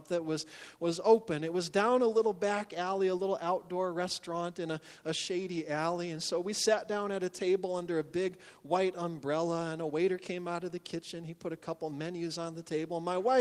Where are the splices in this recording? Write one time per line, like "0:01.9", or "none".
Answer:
none